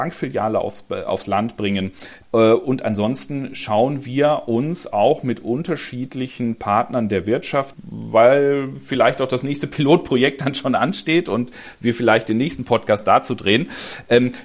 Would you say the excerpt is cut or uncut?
cut